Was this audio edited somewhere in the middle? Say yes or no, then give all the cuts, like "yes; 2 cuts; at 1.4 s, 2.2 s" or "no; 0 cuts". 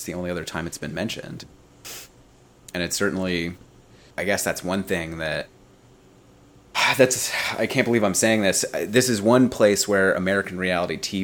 yes; 1 cut; at 4.1 s